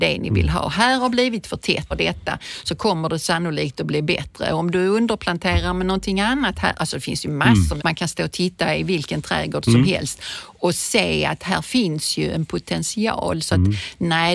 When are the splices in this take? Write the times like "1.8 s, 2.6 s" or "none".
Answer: 1.9 s, 7.8 s